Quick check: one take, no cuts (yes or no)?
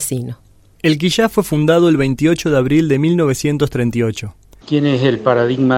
no